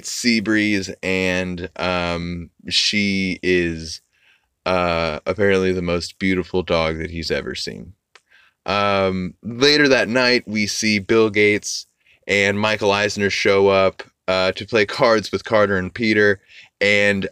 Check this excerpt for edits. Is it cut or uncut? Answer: uncut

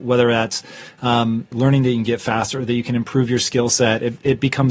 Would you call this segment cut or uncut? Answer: cut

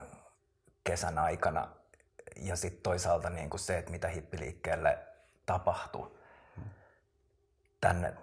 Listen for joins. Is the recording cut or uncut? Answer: uncut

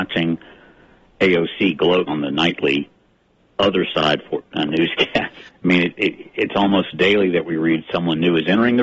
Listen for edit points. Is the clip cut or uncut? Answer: cut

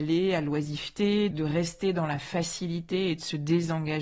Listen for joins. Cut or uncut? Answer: cut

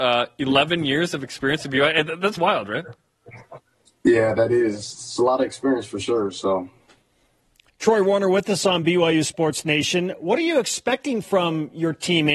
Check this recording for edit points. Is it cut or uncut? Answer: cut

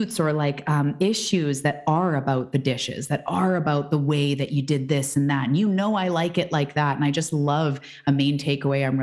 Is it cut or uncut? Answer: uncut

